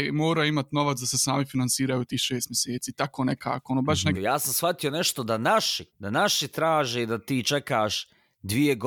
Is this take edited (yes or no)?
yes